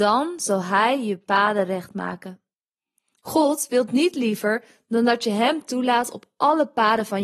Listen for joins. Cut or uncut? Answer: uncut